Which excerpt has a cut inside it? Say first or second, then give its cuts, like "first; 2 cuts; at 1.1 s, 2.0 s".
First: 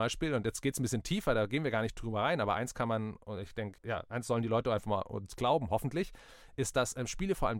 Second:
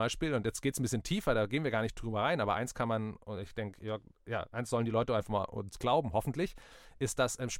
first; 1 cut; at 3.8 s